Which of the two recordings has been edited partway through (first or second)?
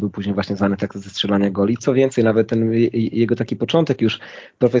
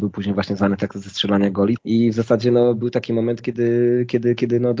second